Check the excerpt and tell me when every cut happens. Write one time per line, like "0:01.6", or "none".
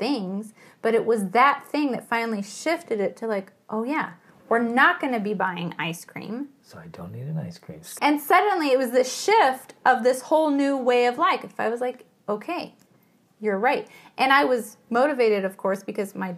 0:08.0